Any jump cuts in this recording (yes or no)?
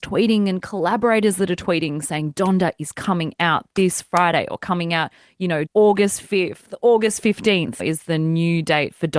yes